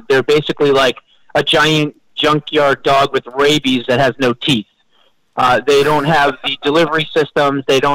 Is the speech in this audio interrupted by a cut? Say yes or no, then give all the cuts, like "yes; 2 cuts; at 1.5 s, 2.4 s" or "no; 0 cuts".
no; 0 cuts